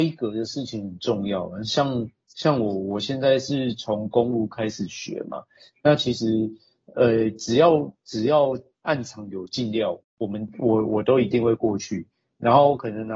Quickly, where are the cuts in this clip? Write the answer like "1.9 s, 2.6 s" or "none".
10.0 s